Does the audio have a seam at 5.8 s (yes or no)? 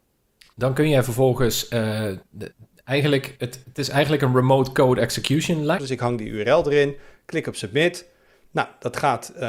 yes